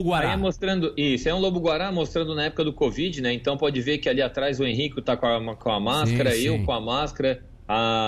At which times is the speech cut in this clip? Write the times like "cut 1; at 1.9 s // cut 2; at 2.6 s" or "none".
none